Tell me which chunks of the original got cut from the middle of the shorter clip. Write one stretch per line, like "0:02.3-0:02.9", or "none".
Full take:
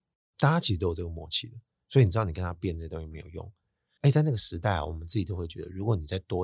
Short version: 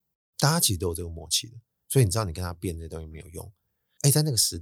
none